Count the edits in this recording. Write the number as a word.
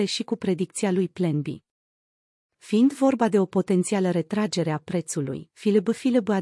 one